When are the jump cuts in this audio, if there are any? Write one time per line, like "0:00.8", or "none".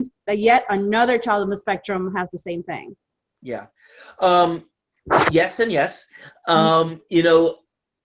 none